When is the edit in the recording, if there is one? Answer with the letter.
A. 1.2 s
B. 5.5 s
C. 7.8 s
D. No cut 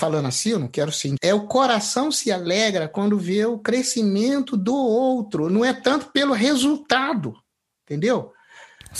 A